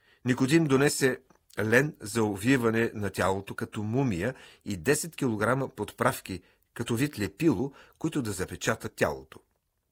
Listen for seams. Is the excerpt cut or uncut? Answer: uncut